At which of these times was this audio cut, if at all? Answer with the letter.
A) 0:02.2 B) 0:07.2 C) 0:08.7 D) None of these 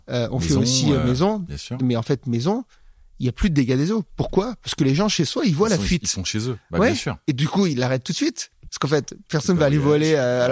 C